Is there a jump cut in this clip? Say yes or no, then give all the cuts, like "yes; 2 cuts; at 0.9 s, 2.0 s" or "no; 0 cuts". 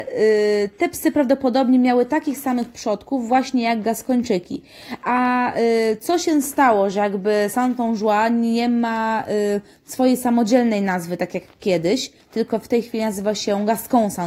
no; 0 cuts